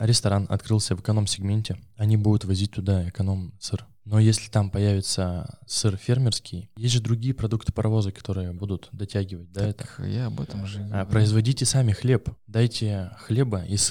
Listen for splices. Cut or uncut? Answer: uncut